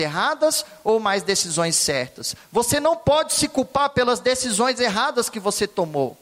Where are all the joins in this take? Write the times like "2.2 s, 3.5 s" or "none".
none